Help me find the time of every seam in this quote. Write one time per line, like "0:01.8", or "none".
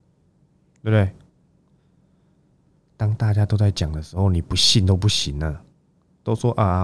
none